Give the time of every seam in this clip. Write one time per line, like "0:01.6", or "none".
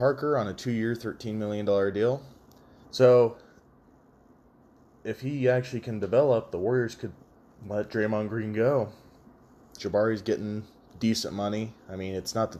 0:02.8
0:09.8